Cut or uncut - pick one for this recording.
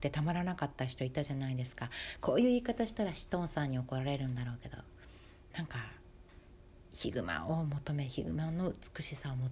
uncut